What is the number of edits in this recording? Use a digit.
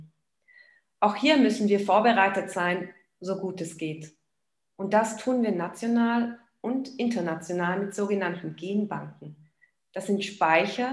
0